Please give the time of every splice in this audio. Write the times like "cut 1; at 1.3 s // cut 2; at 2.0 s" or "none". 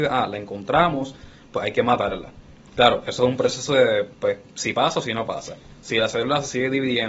none